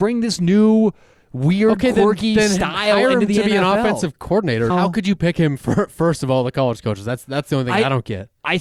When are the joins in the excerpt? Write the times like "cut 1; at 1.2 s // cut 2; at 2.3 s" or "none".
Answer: cut 1; at 4.7 s